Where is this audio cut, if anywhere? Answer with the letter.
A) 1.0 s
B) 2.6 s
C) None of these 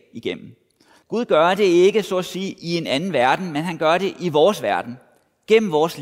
A